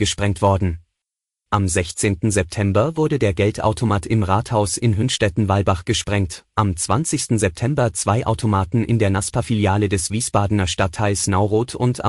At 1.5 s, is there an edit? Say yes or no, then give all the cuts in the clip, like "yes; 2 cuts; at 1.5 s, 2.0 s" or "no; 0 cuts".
yes; 1 cut; at 1.5 s